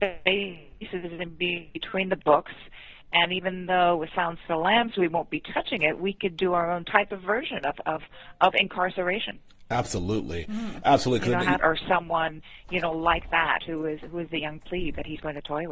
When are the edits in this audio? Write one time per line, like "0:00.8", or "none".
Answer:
0:11.6